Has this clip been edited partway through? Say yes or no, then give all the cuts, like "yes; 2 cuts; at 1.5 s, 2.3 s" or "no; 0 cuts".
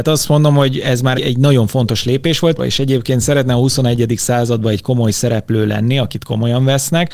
yes; 2 cuts; at 1.1 s, 2.6 s